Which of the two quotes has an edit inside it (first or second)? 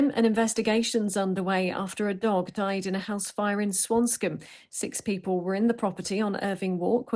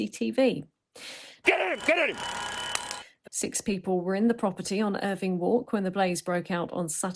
second